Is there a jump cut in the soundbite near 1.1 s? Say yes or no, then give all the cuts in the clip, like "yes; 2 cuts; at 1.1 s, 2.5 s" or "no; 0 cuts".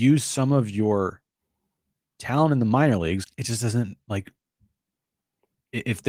no; 1 cut; at 3.2 s